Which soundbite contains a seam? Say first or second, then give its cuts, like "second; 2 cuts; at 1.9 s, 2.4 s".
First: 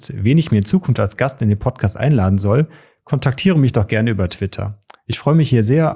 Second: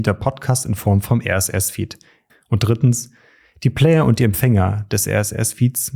second; 1 cut; at 2.3 s